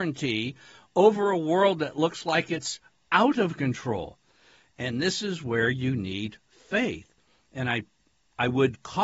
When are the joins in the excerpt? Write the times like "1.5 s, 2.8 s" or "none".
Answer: none